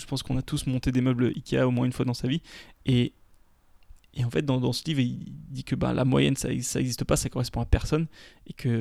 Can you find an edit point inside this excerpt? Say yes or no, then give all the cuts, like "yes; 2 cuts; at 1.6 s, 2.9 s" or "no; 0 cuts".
yes; 1 cut; at 2.7 s